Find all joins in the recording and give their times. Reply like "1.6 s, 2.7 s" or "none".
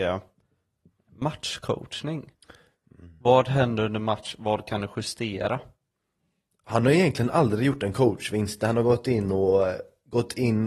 none